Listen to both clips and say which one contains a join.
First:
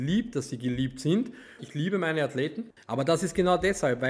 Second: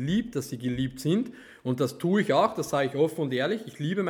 first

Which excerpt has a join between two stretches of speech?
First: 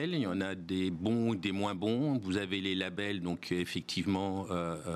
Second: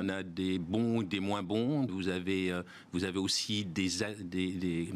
second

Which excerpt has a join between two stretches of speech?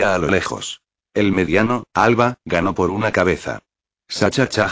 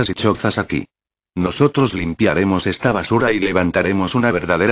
first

